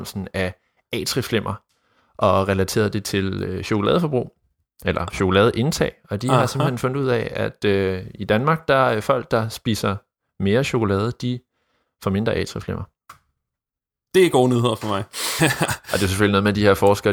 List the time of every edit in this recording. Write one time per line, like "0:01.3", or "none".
0:15.4